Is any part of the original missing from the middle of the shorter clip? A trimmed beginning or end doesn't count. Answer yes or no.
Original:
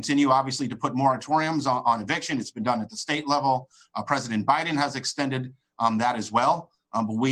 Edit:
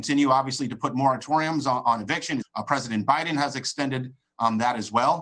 yes